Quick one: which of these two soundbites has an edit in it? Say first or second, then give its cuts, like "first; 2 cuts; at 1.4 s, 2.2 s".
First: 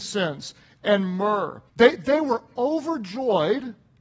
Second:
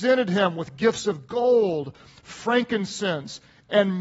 first; 1 cut; at 1.7 s